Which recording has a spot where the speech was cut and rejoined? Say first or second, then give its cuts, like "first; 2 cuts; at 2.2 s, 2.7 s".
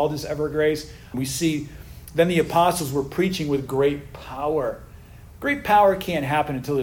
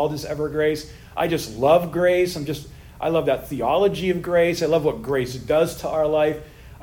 first; 1 cut; at 1.1 s